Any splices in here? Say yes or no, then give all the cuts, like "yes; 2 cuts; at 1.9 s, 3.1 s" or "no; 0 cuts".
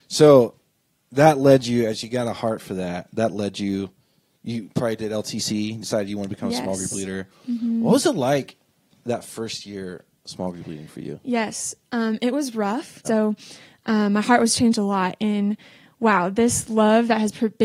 yes; 1 cut; at 13.0 s